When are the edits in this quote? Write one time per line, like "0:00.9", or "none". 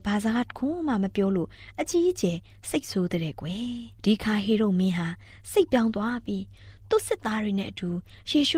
0:03.9